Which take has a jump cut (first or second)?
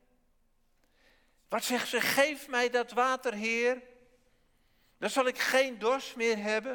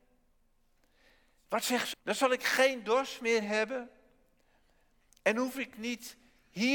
second